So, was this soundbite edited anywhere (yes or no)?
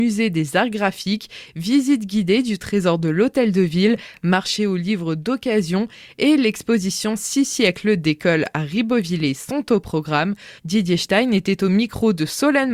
yes